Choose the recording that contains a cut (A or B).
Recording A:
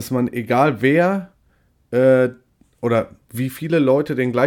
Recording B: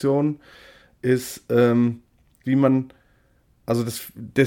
B